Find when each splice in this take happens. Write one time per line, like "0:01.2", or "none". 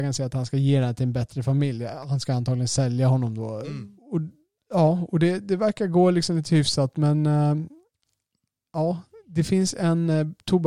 0:04.0